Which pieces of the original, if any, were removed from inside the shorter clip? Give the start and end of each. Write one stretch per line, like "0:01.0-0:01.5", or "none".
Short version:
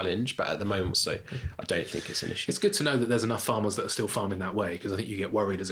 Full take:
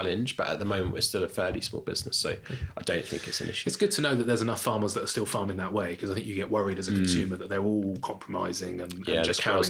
0:00.9-0:02.1